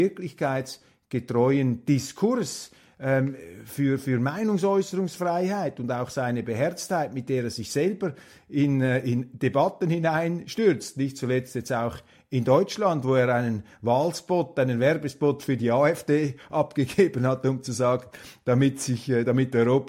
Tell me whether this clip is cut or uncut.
uncut